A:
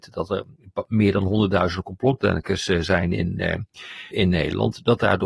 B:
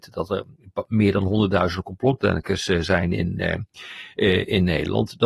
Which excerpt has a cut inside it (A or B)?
A